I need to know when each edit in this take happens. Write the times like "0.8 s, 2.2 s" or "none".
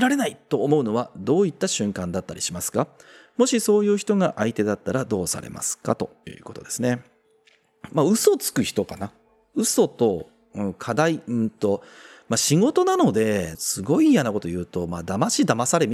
7.9 s, 13.5 s